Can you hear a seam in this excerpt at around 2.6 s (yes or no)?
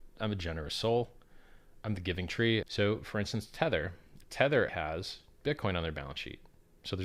yes